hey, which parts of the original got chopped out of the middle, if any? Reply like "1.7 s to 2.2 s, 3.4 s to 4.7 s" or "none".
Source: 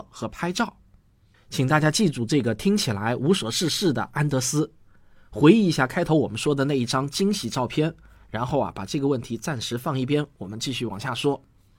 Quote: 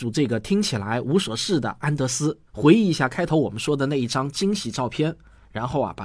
3.5 s to 3.7 s, 4.8 s to 5.2 s